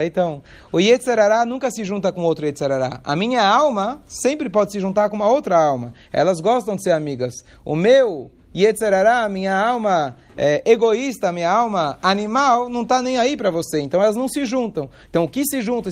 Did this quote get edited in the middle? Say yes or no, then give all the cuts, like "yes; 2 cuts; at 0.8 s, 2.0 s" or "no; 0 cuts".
no; 0 cuts